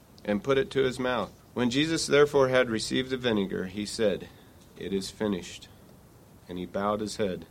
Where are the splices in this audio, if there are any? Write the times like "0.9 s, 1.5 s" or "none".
1.4 s